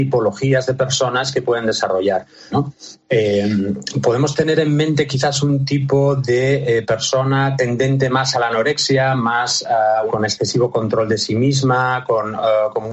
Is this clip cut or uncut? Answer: cut